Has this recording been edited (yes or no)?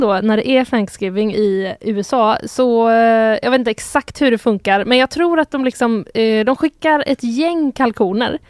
no